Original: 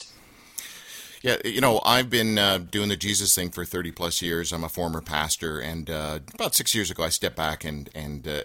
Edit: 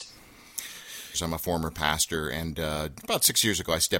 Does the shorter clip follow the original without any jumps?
no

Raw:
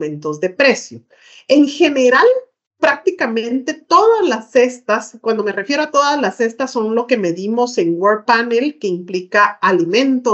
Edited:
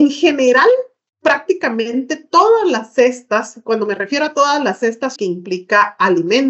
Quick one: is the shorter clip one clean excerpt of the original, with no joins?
no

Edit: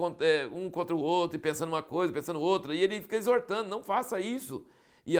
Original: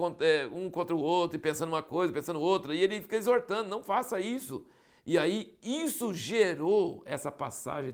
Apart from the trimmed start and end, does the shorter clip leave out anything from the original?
no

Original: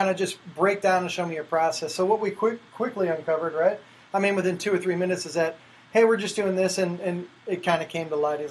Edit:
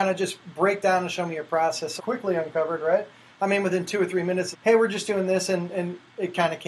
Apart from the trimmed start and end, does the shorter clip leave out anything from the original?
yes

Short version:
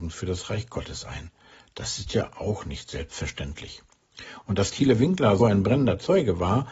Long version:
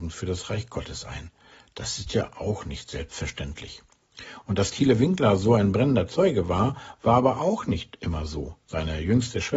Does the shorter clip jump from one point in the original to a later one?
yes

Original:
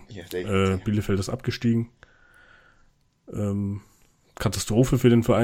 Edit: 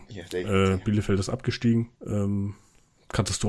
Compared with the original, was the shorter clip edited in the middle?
yes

